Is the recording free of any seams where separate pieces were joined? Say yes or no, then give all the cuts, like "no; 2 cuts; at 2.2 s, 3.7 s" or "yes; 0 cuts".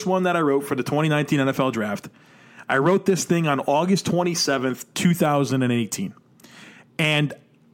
yes; 0 cuts